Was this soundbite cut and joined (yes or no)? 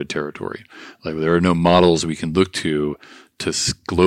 no